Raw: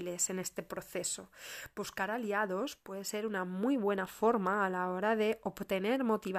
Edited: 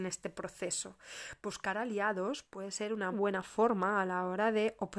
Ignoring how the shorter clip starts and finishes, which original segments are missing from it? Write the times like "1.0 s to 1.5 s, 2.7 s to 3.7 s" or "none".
3.4 s to 3.8 s

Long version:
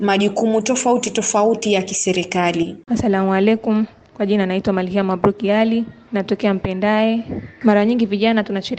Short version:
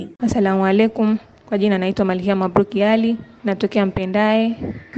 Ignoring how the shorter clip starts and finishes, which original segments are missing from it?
none

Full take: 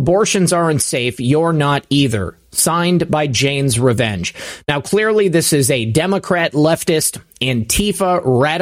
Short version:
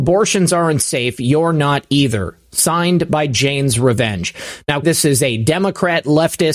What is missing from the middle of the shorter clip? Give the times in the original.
4.8 s to 5.3 s

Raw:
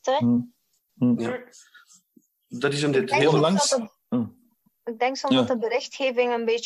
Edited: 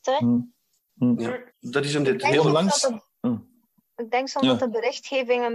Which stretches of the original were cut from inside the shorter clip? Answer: 1.5 s to 2.4 s

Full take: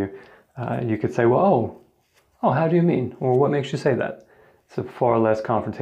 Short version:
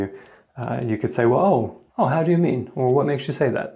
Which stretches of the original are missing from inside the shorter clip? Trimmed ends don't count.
1.9 s to 2.3 s

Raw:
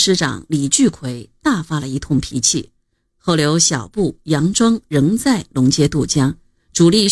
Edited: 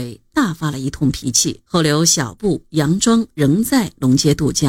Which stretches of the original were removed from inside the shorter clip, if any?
2.7 s to 3.2 s

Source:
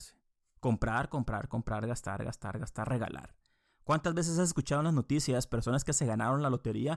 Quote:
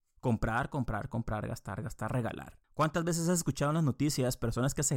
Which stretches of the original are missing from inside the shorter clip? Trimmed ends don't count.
1.8 s to 2.2 s, 3.4 s to 3.7 s

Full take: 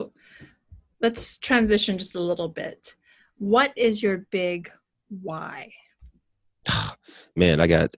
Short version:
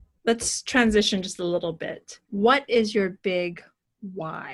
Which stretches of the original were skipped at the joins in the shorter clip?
3.0 s to 3.3 s

